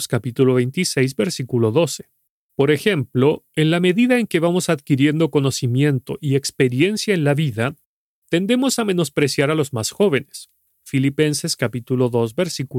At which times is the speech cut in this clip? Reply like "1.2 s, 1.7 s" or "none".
2.5 s, 10.7 s